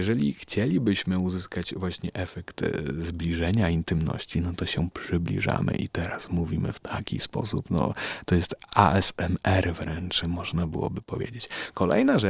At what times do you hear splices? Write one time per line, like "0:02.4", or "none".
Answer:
0:10.2